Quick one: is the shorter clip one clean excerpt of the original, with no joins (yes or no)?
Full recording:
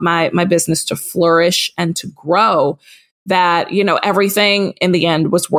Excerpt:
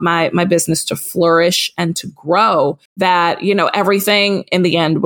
no